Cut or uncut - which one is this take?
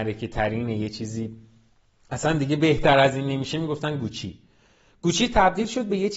uncut